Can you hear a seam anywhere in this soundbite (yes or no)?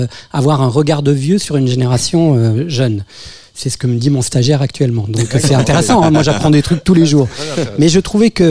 no